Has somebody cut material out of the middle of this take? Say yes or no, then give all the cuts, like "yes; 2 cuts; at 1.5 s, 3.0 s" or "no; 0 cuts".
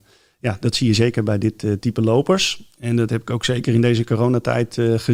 yes; 1 cut; at 1.8 s